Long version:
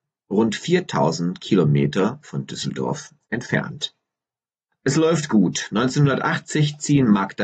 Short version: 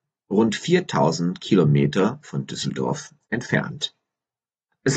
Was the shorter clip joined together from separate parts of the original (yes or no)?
no